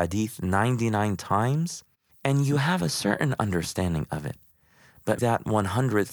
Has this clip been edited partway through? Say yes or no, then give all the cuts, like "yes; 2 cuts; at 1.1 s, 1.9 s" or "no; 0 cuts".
yes; 1 cut; at 5.2 s